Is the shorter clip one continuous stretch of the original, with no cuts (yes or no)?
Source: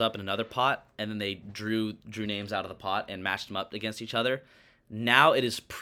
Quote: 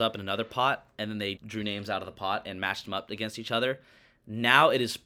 no